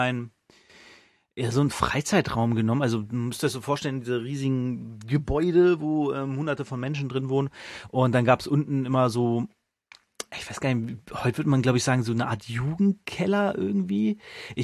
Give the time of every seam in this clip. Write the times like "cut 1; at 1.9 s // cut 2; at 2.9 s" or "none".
none